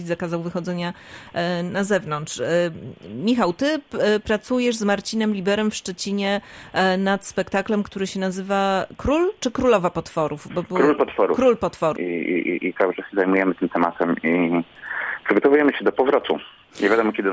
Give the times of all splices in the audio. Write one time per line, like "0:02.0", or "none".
0:12.0